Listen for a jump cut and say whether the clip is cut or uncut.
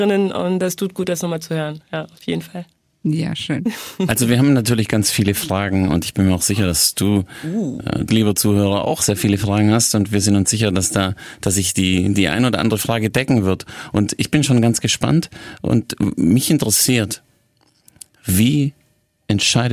cut